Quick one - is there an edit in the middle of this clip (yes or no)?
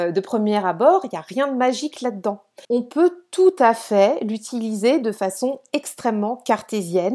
yes